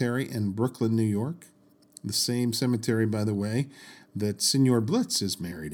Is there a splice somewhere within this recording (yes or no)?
no